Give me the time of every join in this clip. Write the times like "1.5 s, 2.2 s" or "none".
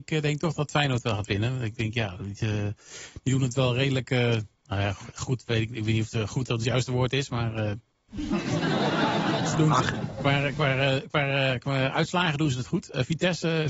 4.6 s